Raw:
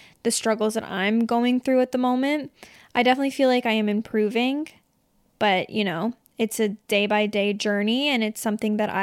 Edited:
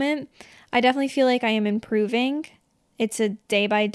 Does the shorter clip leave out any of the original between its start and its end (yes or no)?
yes